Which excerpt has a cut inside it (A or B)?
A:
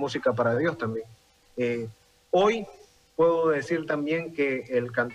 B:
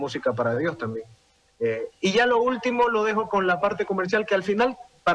A